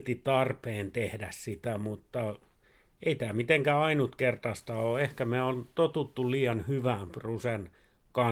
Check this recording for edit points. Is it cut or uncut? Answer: uncut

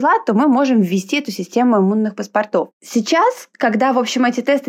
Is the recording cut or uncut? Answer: uncut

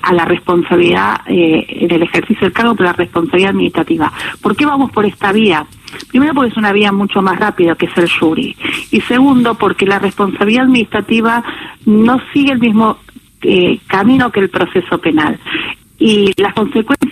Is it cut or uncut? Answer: uncut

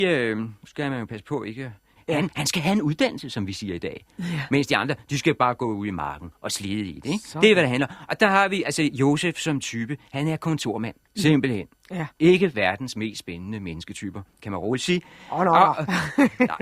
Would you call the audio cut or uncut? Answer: cut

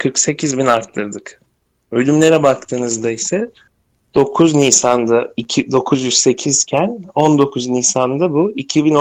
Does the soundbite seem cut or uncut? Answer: uncut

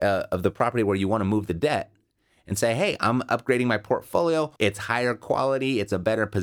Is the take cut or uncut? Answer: cut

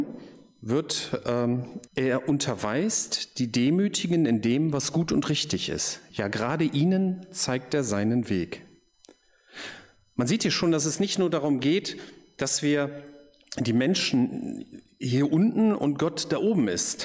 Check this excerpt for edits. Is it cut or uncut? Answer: cut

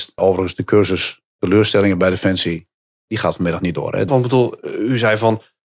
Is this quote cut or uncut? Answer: cut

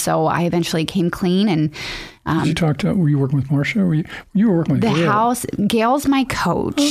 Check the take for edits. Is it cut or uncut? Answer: uncut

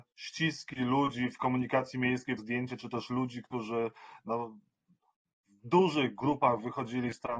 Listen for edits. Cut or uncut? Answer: cut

